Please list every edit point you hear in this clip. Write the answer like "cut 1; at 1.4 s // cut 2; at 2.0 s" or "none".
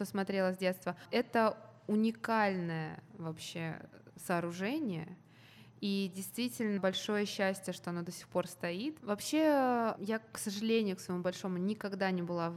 cut 1; at 9.0 s